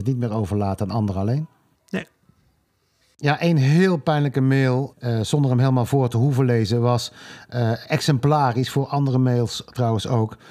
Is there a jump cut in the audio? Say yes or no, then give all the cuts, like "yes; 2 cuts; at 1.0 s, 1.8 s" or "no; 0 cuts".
no; 0 cuts